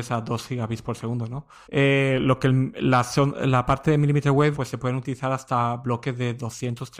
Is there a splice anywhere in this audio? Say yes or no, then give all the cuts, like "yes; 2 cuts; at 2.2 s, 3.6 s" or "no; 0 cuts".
yes; 2 cuts; at 1.6 s, 4.5 s